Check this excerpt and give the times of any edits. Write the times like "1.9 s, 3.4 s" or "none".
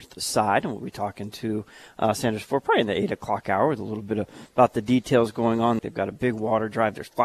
5.8 s